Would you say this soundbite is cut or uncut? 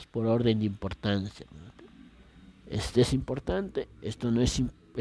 uncut